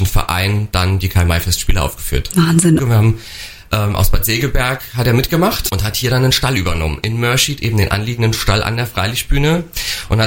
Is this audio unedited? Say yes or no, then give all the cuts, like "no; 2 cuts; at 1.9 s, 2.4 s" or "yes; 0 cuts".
no; 2 cuts; at 2.8 s, 5.7 s